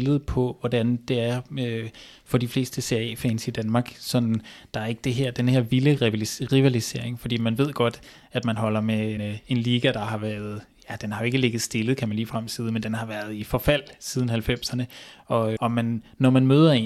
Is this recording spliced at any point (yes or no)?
yes